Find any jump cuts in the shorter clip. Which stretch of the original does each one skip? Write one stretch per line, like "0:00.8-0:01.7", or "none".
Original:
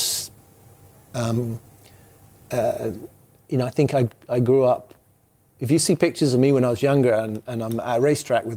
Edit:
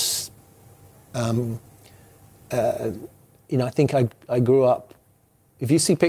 none